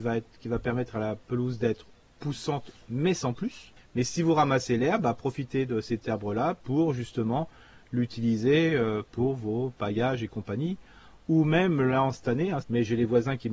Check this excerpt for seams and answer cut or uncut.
cut